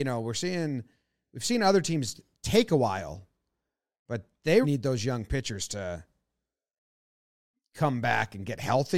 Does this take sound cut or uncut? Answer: cut